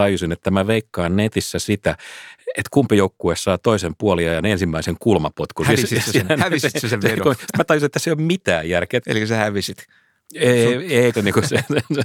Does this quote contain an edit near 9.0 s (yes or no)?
yes